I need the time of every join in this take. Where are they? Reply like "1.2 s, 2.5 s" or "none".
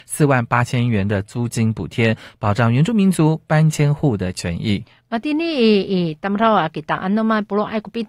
none